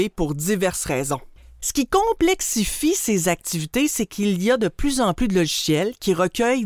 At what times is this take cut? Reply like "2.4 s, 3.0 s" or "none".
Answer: 1.6 s